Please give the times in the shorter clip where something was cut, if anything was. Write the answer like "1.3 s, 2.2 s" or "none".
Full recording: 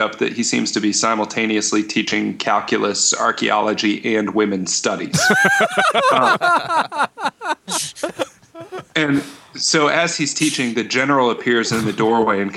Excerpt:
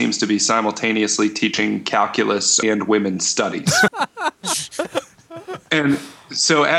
2.6 s, 3.9 s